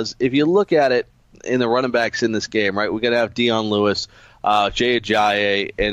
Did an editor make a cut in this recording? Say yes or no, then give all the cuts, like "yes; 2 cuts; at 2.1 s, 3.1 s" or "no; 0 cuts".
no; 0 cuts